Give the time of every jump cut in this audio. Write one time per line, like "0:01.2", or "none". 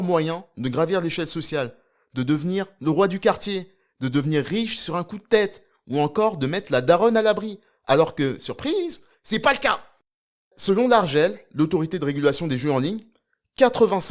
none